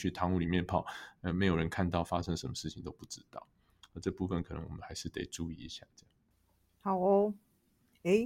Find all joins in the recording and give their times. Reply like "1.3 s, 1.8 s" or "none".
none